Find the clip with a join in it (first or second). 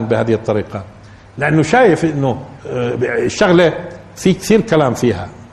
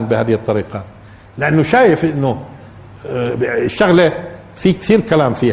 first